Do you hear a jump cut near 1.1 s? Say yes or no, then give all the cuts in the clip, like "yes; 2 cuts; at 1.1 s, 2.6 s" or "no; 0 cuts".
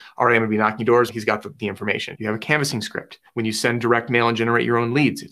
yes; 3 cuts; at 1.1 s, 2.1 s, 3.3 s